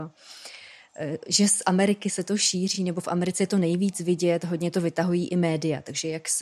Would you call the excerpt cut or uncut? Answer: uncut